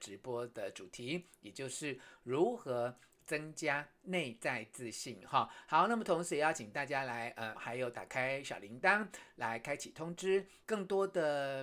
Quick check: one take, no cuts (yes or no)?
no